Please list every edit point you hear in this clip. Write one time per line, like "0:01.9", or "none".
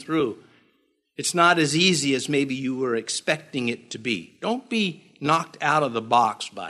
none